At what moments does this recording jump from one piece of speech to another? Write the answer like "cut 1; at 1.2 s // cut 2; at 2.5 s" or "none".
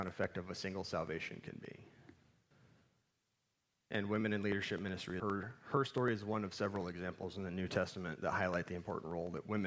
cut 1; at 5.2 s